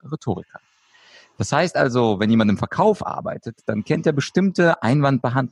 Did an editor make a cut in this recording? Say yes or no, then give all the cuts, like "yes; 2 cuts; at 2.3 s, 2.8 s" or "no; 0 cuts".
no; 0 cuts